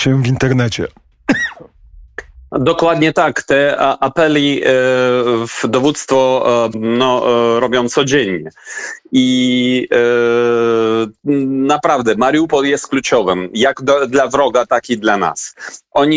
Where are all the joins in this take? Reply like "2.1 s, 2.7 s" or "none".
6.7 s